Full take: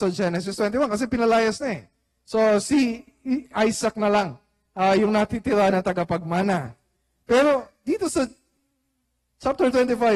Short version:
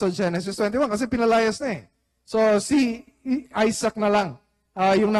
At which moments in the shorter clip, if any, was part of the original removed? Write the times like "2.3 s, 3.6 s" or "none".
none